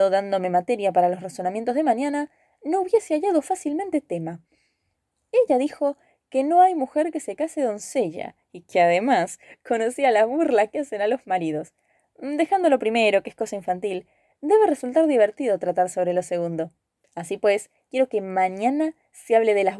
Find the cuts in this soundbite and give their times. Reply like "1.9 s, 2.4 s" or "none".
none